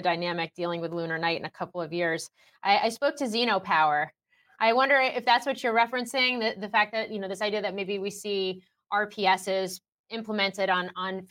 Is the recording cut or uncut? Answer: uncut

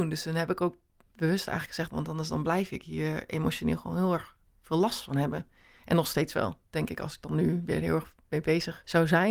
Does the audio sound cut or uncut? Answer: cut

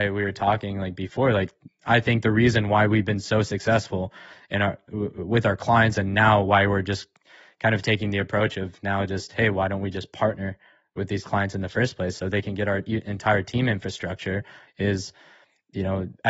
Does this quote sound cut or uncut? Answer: uncut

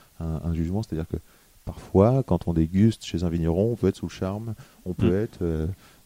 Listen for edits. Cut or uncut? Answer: uncut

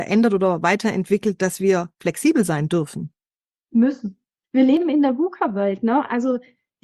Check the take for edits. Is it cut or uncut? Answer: uncut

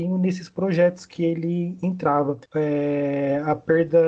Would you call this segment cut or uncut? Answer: cut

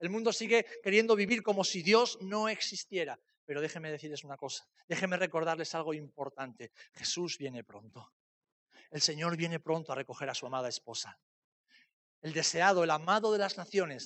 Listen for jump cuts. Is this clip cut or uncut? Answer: uncut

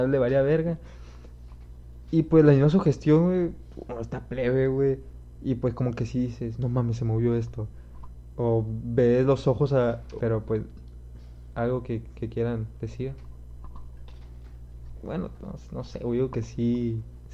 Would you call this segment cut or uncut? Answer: cut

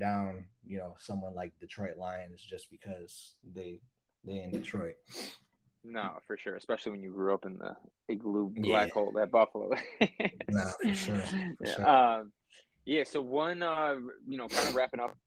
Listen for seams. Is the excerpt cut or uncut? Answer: uncut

